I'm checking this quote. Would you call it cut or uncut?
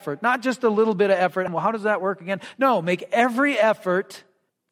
cut